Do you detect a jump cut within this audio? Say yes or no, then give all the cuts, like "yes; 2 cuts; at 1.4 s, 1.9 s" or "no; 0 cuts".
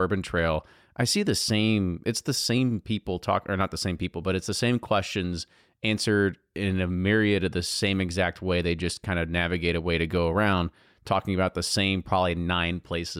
no; 0 cuts